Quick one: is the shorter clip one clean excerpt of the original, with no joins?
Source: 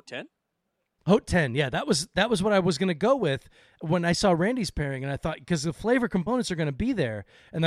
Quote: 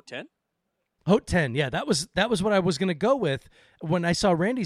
yes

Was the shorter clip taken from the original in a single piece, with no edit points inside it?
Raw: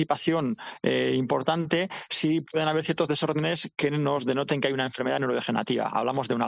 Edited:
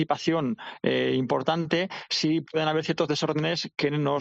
yes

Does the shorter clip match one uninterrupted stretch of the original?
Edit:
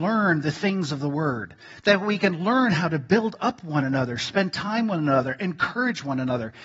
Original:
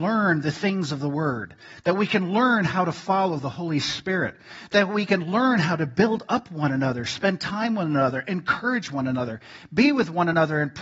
no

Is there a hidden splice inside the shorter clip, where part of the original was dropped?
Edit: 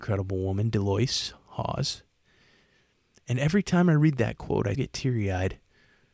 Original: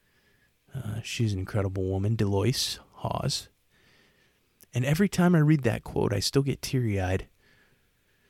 yes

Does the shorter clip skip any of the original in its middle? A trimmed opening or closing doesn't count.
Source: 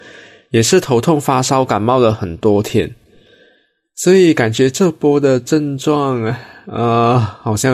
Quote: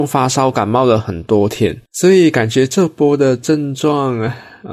yes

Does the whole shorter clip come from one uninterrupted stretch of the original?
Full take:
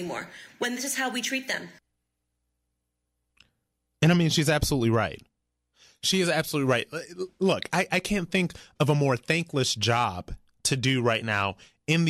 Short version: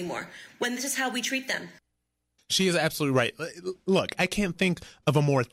no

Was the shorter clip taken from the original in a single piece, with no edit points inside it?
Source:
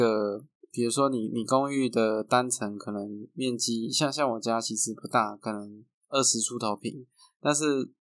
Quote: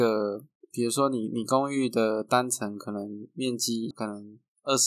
no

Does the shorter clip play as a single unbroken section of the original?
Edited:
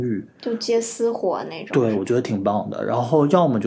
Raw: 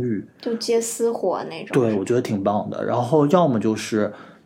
yes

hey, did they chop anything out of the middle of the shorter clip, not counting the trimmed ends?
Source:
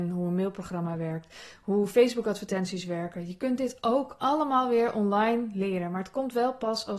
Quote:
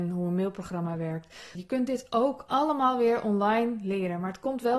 yes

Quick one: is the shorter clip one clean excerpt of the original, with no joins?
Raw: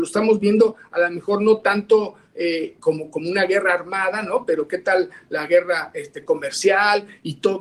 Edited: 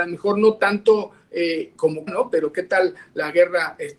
no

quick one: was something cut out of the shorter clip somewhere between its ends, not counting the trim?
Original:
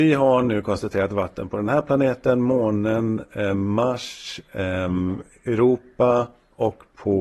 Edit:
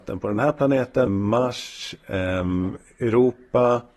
yes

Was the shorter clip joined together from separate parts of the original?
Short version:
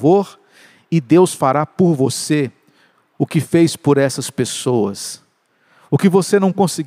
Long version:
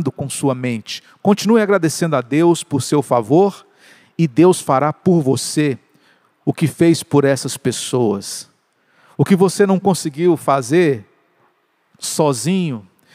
no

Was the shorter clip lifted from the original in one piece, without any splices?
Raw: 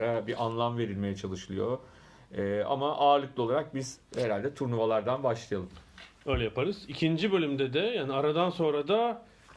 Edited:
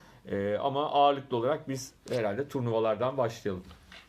yes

